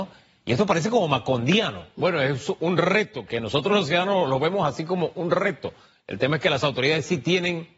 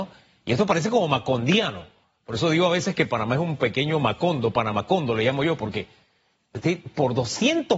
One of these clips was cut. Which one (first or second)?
first